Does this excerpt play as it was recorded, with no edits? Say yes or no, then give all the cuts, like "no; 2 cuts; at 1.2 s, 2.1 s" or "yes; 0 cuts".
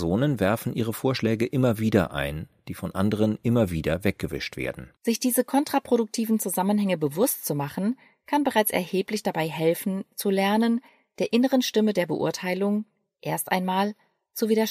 no; 1 cut; at 5.0 s